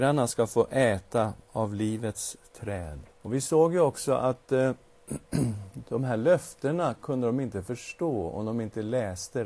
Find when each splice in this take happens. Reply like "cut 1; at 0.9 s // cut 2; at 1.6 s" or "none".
cut 1; at 3.1 s